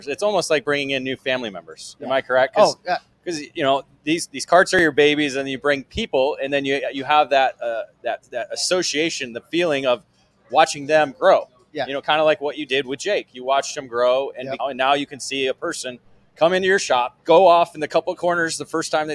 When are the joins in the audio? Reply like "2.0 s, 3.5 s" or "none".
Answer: 14.6 s, 17.2 s